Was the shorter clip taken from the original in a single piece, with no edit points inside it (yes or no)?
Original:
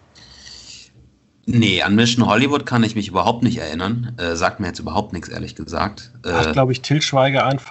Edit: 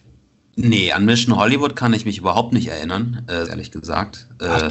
no